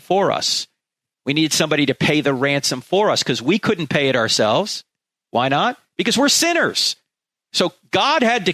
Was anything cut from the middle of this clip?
no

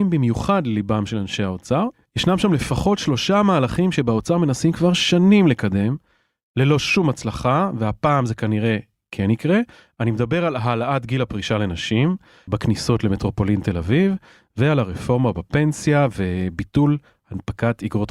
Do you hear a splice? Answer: yes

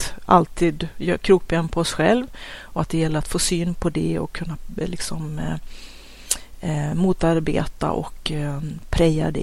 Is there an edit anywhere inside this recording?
no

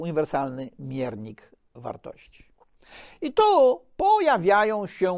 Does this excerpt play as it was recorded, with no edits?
yes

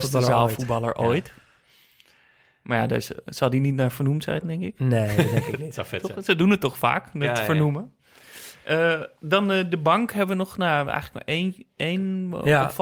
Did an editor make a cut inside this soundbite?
no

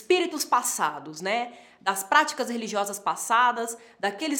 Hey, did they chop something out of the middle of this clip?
no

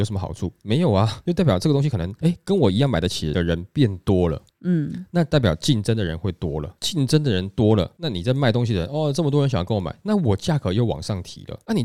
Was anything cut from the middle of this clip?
no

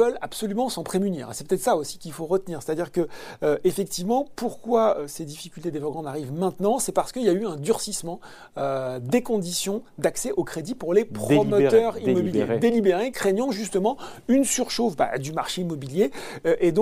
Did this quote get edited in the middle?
yes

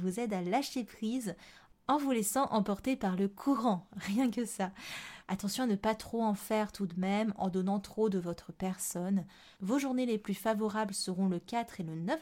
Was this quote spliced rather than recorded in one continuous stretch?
yes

